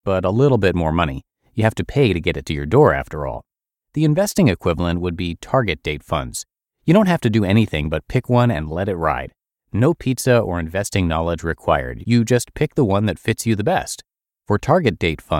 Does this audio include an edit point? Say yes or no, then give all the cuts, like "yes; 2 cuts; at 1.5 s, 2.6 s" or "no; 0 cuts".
no; 0 cuts